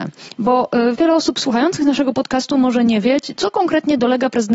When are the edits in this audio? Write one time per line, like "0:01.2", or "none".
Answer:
0:00.9
0:03.3

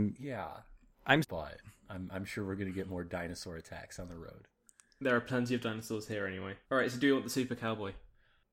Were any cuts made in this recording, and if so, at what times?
0:01.2
0:06.6

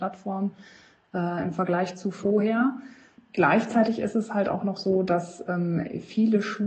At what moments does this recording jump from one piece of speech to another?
none

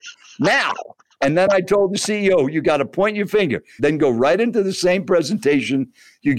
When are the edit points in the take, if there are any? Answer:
0:03.8

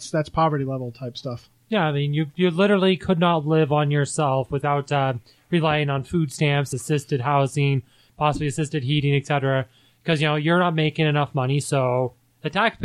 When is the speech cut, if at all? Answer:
none

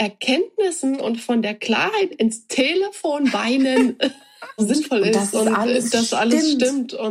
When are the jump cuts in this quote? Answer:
0:02.1
0:04.6

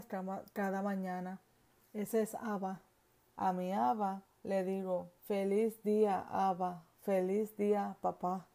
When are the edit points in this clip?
0:03.3
0:05.2

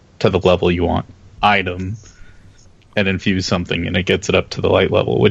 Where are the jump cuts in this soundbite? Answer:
0:01.4

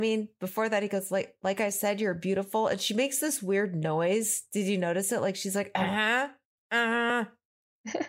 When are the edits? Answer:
none

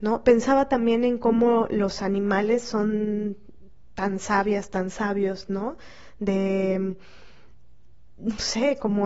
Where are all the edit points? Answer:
none

